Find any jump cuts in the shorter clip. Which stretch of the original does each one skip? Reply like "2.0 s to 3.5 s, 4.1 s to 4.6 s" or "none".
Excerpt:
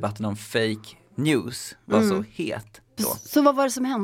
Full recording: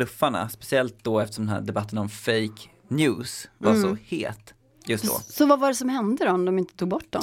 4.7 s to 5.0 s